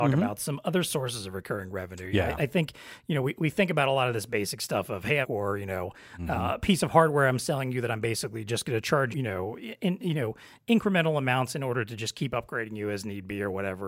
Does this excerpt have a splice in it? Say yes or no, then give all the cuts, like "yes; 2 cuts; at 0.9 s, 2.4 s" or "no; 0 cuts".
yes; 2 cuts; at 5.2 s, 9.1 s